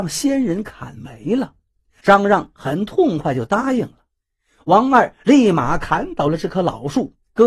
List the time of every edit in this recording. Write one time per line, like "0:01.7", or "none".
0:02.0